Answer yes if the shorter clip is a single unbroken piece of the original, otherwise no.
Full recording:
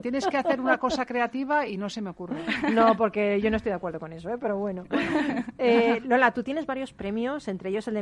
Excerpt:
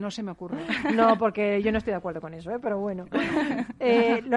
yes